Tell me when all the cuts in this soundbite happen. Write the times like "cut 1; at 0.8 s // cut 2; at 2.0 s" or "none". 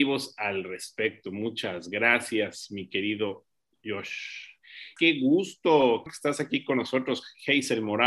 cut 1; at 5.0 s // cut 2; at 6.1 s